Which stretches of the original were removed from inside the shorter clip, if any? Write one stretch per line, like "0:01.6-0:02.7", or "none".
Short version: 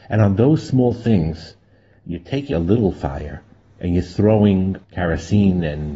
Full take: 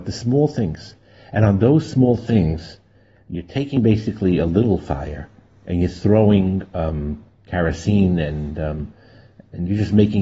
0:03.7-0:04.4
0:06.7-0:07.4